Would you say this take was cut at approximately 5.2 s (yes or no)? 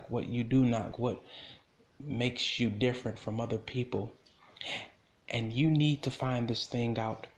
no